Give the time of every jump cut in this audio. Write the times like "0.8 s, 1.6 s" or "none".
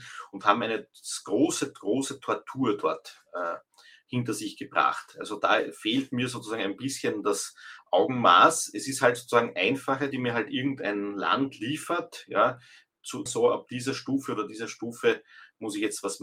10.1 s, 13.3 s